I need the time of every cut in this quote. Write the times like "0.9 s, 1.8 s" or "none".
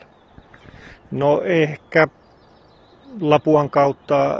1.0 s